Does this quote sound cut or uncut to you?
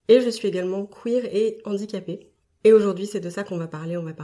cut